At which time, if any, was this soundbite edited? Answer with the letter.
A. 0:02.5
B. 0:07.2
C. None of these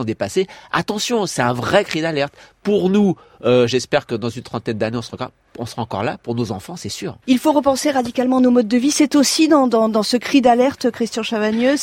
B